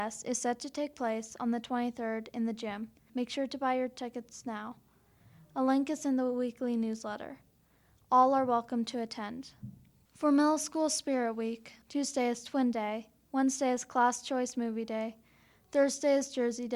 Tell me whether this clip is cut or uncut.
cut